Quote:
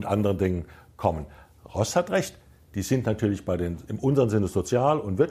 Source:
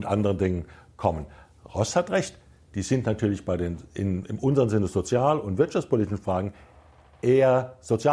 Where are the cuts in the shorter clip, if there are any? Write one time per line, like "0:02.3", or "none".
0:03.9